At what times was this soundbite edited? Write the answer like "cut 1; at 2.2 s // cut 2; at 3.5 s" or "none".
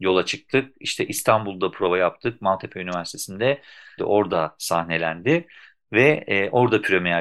cut 1; at 4.0 s